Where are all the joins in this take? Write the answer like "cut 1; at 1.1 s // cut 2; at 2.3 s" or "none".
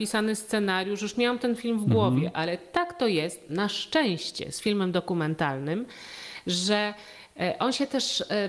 none